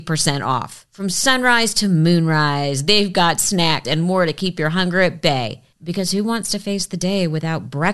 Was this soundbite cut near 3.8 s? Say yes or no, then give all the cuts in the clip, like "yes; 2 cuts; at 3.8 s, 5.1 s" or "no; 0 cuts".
yes; 1 cut; at 3.8 s